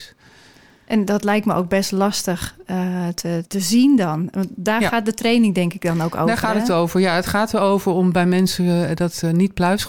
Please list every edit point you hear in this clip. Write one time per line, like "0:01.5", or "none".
0:03.5